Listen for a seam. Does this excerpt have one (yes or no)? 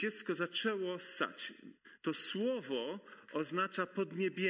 yes